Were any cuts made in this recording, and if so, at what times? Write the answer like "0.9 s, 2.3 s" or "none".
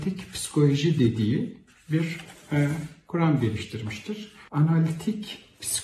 4.5 s